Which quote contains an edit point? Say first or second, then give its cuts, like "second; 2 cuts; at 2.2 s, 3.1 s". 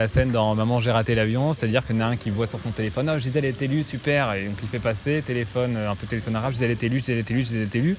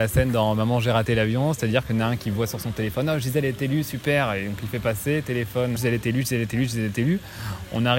second; 1 cut; at 5.8 s